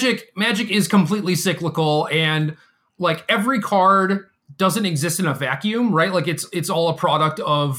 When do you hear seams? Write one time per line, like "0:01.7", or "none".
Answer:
none